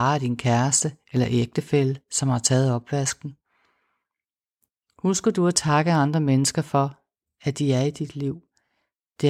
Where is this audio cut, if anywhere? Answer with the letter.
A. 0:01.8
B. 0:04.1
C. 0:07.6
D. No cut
D